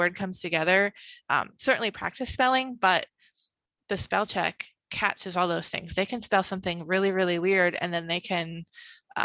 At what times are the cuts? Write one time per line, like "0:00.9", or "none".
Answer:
0:01.6